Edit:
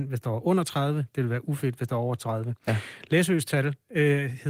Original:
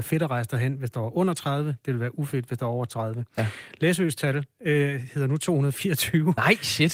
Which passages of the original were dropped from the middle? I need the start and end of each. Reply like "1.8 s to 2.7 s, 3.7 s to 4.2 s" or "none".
none